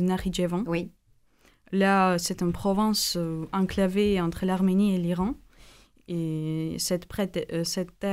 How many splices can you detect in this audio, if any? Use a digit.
0